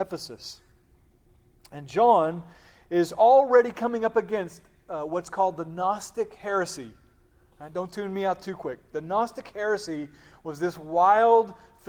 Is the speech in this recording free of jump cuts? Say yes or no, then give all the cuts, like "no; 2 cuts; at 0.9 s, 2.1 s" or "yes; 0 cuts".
yes; 0 cuts